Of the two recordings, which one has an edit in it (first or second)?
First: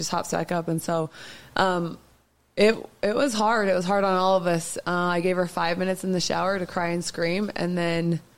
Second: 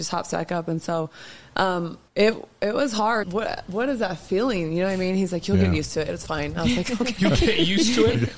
second